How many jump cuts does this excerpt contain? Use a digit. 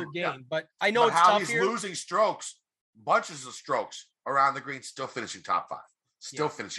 0